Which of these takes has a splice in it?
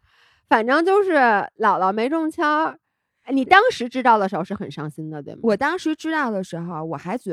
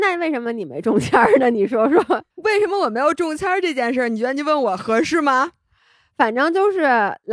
second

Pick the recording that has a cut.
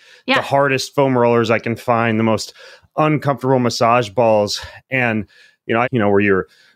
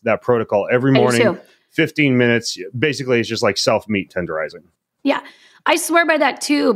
first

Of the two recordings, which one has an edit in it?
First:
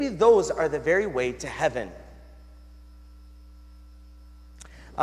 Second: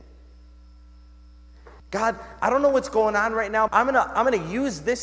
second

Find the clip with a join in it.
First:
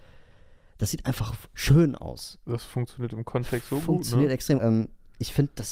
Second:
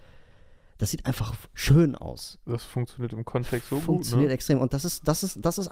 first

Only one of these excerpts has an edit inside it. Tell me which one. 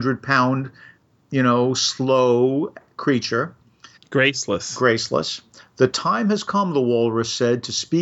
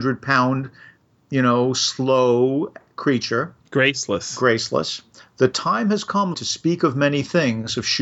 second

